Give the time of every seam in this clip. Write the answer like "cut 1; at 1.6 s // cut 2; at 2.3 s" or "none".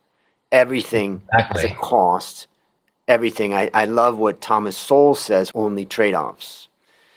cut 1; at 5.5 s

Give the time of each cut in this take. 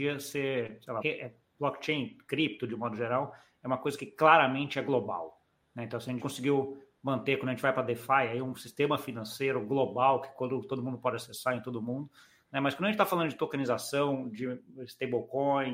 cut 1; at 1.0 s // cut 2; at 6.2 s

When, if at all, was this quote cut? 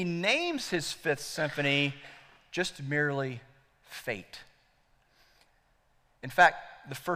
none

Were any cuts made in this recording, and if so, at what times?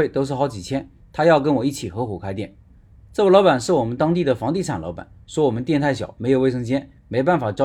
none

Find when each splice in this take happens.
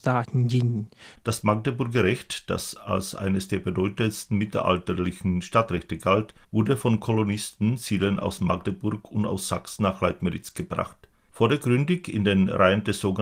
cut 1; at 1.2 s // cut 2; at 6.4 s // cut 3; at 11.3 s

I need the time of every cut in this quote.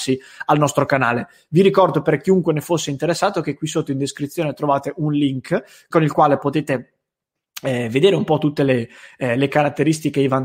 cut 1; at 5.9 s

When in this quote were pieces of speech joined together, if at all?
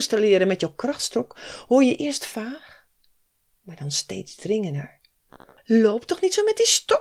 cut 1; at 5.6 s

